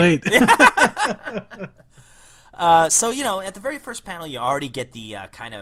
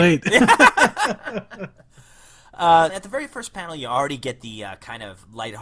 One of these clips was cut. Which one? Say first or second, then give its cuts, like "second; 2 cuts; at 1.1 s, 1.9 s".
second; 1 cut; at 2.9 s